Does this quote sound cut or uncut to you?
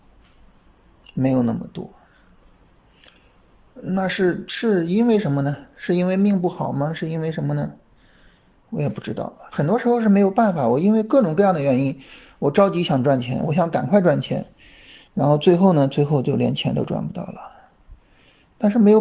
cut